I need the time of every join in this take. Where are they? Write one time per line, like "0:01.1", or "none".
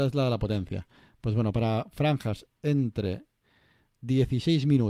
none